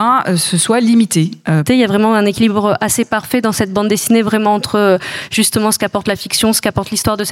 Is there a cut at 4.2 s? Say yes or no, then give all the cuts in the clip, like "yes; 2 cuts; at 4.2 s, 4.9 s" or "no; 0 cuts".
no; 1 cut; at 1.7 s